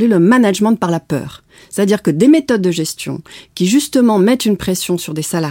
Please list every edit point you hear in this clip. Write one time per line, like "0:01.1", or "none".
none